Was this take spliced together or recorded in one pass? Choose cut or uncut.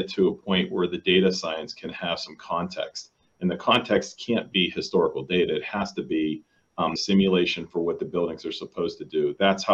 cut